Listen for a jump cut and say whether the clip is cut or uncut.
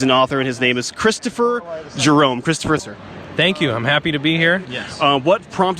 cut